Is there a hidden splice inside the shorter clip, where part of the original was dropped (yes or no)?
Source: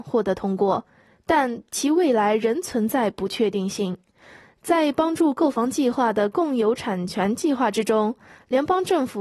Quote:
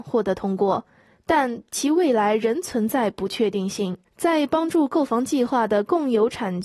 yes